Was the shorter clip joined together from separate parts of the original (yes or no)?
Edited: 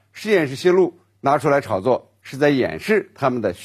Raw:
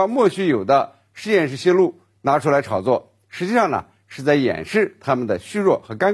yes